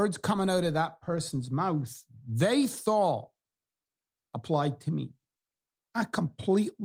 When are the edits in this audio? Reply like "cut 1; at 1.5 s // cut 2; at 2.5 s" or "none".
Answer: cut 1; at 5.8 s